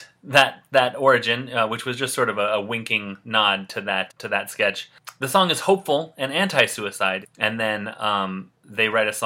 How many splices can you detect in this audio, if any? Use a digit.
2